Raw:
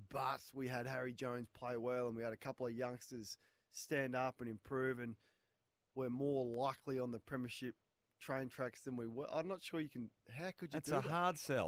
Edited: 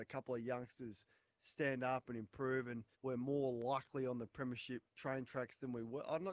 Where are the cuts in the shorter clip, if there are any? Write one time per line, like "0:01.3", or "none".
0:02.9
0:04.9